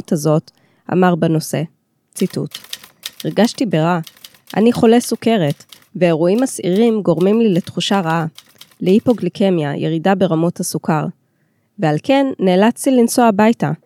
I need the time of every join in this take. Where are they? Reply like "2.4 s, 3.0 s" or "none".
3.1 s